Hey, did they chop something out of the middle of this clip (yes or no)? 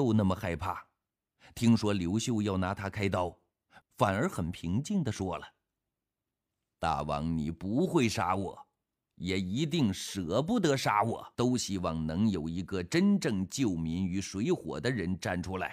yes